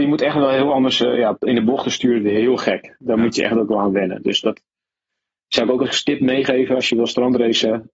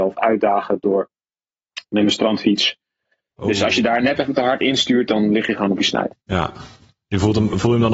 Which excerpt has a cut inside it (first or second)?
second